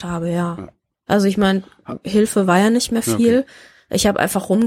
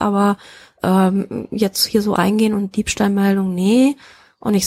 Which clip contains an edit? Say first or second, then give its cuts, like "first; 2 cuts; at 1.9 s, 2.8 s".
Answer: second; 1 cut; at 2.2 s